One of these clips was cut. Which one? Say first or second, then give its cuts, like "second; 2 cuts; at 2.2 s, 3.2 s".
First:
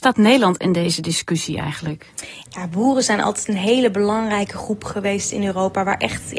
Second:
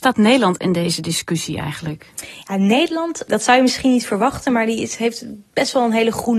first; 1 cut; at 2.4 s